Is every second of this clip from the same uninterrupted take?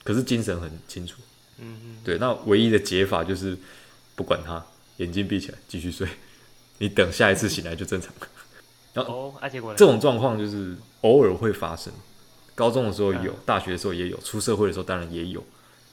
no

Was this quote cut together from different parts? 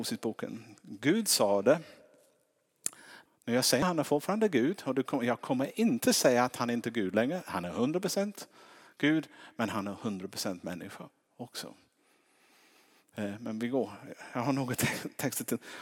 yes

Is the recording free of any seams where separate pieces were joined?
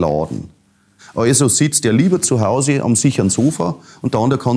no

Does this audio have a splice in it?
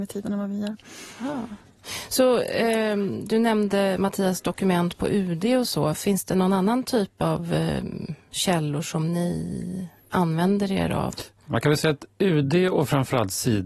no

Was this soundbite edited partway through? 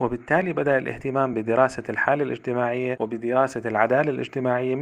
no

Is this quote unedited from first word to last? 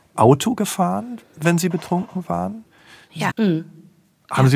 no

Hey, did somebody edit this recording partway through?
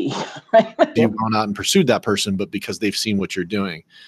yes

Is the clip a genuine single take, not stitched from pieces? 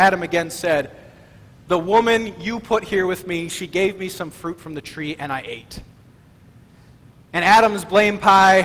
yes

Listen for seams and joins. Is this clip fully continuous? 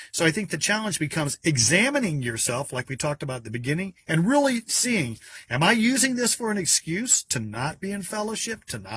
yes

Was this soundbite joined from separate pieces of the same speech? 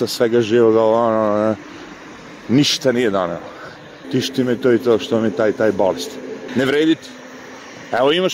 yes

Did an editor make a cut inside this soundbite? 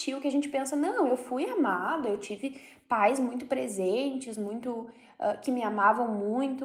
no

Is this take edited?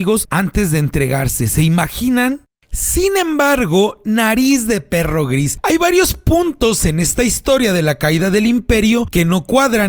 no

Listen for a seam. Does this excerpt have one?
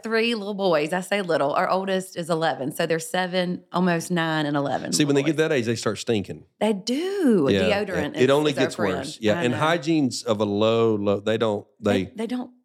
no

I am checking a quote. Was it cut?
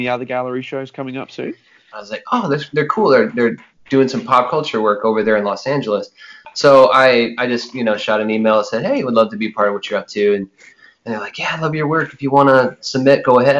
yes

